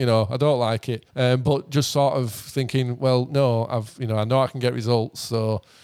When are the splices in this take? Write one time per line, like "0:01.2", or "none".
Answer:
none